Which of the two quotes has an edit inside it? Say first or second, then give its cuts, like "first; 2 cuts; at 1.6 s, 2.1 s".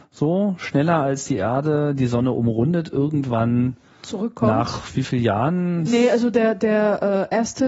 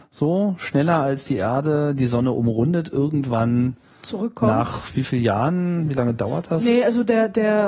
first; 1 cut; at 5.9 s